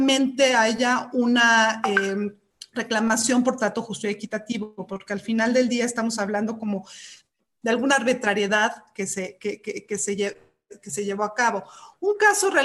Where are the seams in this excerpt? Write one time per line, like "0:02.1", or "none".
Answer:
none